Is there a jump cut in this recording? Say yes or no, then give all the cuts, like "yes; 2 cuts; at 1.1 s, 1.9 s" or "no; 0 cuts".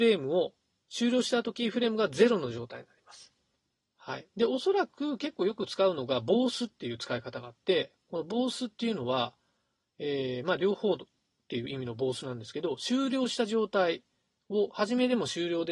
no; 0 cuts